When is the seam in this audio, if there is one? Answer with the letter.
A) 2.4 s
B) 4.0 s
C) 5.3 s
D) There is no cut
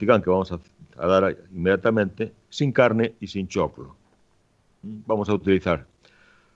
A